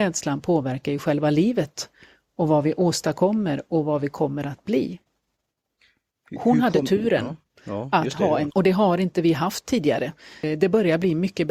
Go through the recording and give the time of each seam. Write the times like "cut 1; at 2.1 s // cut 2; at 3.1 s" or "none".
cut 1; at 8.5 s